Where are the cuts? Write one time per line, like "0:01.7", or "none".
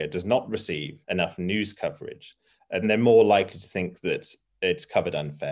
0:01.0
0:02.8